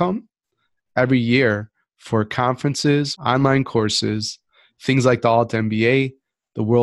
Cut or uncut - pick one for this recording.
cut